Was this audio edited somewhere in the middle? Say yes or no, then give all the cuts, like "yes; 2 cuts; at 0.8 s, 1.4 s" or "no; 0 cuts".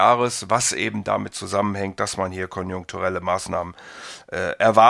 no; 0 cuts